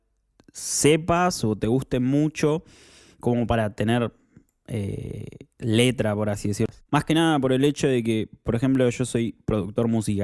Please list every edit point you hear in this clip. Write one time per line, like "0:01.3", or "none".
0:06.8